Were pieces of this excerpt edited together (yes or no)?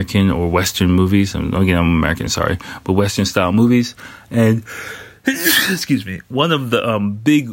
no